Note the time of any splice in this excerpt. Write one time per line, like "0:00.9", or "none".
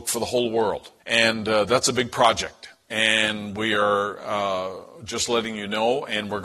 0:01.0